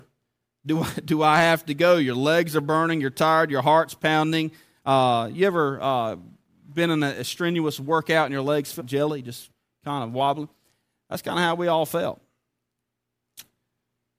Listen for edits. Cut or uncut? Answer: cut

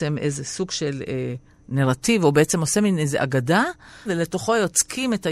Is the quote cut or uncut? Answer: cut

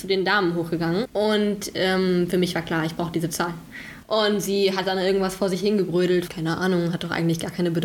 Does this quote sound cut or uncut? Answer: cut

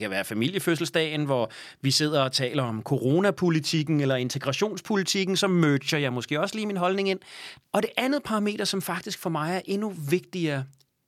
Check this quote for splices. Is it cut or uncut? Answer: cut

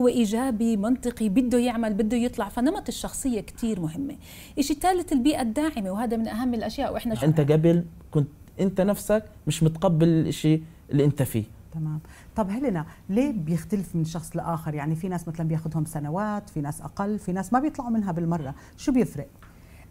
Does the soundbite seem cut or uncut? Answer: cut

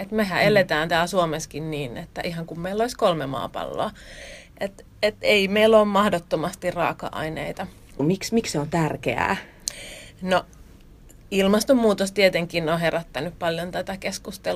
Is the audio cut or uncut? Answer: cut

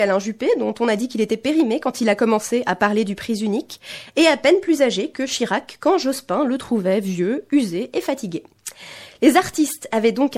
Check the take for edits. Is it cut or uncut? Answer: uncut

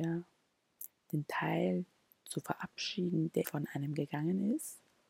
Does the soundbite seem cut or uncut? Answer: cut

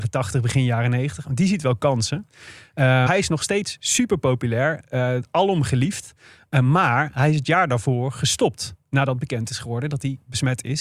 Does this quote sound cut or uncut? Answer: cut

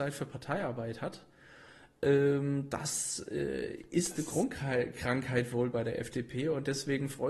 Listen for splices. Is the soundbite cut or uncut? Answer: uncut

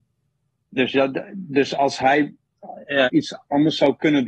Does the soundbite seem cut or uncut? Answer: cut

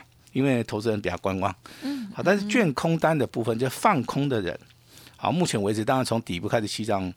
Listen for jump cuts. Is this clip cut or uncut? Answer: uncut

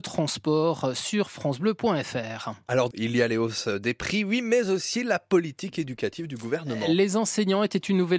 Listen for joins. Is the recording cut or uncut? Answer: cut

